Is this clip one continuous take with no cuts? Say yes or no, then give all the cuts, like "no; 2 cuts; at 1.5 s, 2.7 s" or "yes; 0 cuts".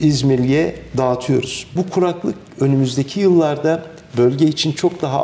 no; 1 cut; at 1.8 s